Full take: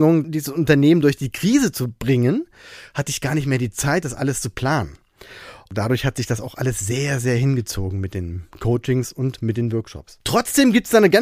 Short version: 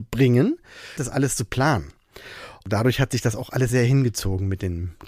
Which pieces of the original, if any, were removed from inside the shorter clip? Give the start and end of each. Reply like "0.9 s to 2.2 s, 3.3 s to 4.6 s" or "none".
2.9 s to 4.0 s, 6.7 s to 7.2 s

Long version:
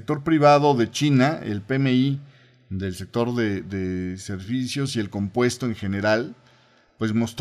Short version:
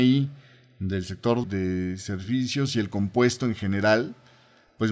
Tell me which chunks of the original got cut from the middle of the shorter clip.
3.3 s to 3.6 s

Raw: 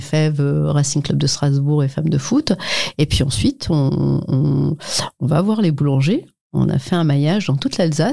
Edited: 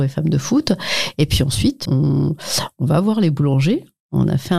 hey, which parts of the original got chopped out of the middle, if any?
3.7 s to 4.3 s

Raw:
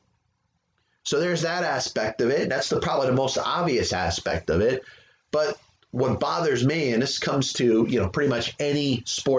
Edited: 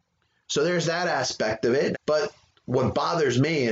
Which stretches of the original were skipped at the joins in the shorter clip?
2.5 s to 5.2 s

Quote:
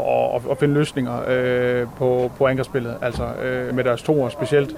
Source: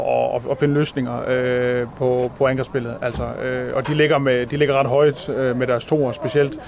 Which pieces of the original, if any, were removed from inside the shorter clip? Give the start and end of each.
3.7 s to 5.5 s

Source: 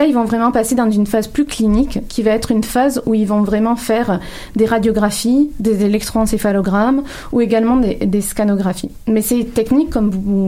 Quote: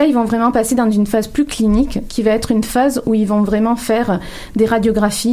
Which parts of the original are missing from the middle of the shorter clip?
none

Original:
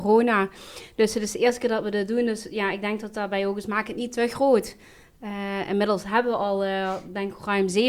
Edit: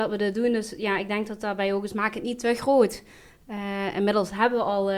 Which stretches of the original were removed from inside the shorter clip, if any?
none

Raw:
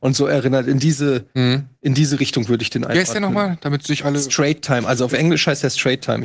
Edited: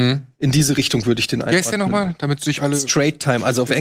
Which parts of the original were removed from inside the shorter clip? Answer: none

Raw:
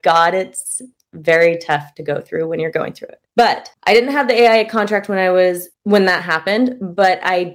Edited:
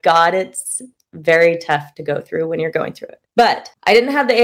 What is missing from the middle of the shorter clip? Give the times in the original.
none

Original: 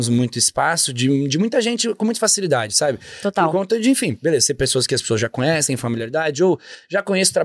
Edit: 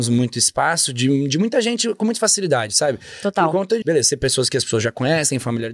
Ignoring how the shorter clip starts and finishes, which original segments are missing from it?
3.8 s to 4.2 s

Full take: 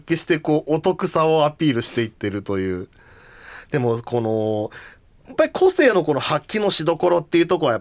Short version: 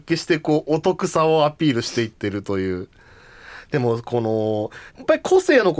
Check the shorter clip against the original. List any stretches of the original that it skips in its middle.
4.9 s to 5.2 s

